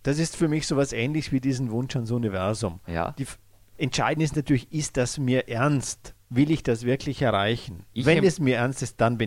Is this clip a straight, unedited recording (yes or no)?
no